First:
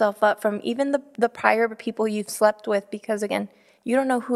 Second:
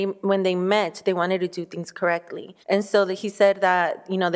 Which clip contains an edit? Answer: second; 1 cut; at 2.6 s

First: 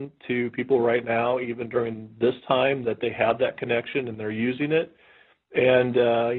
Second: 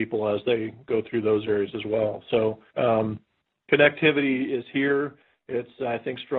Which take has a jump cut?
second; 1 cut; at 2.7 s

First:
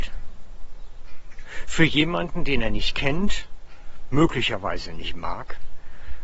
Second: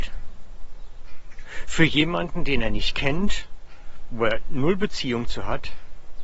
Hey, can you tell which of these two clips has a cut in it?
second; 1 cut; at 4.1 s

